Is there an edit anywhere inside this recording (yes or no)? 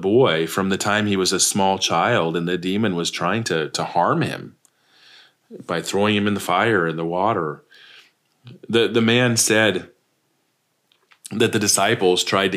no